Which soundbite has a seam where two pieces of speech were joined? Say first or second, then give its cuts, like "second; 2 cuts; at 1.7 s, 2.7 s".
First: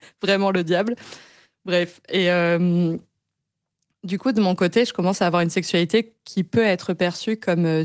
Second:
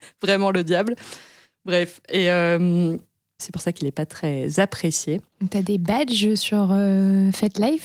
second; 1 cut; at 3.4 s